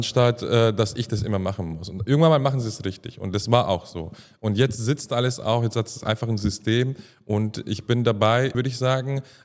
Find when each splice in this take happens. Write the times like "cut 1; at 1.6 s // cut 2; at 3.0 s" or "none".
cut 1; at 8.5 s

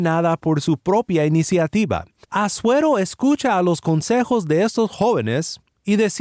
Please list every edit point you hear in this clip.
cut 1; at 2.2 s

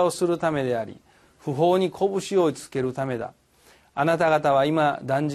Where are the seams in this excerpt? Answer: none

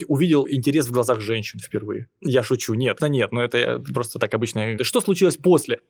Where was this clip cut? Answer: cut 1; at 3.0 s // cut 2; at 4.8 s

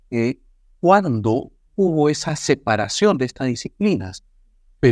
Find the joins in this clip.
cut 1; at 1.7 s

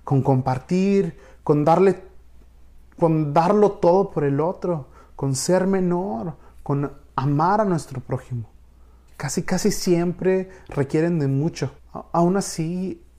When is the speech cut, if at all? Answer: cut 1; at 9.1 s // cut 2; at 11.8 s

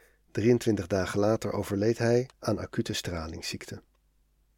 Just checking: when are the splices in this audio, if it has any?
cut 1; at 2.3 s

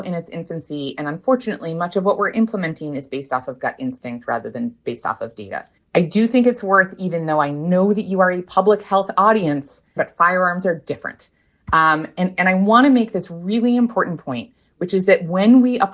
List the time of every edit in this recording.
cut 1; at 5.8 s // cut 2; at 10.0 s

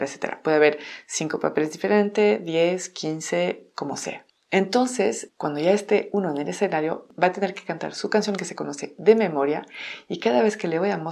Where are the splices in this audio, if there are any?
none

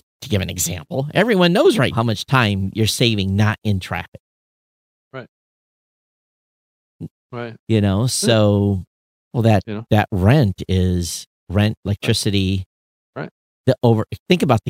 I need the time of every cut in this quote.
cut 1; at 1.9 s // cut 2; at 7.1 s // cut 3; at 9.2 s

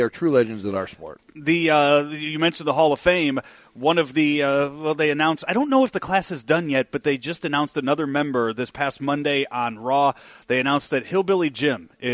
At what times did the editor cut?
none

